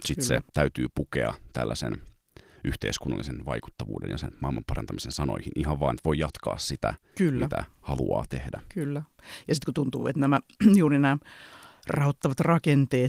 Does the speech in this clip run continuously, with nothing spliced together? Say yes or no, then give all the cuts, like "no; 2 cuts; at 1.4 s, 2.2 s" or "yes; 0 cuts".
yes; 0 cuts